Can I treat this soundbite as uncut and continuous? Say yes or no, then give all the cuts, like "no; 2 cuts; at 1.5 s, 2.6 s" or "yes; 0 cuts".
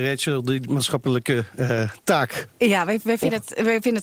yes; 0 cuts